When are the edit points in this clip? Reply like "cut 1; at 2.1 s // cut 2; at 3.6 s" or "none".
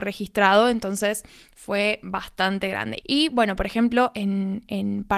cut 1; at 3.0 s